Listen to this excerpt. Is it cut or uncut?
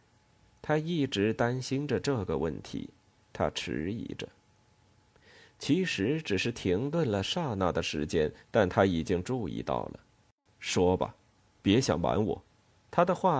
uncut